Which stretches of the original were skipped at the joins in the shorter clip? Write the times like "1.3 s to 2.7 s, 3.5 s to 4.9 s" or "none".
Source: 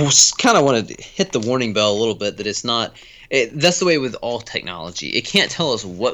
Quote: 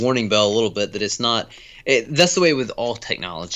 none